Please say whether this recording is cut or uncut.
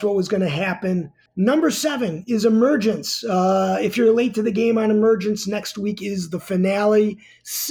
cut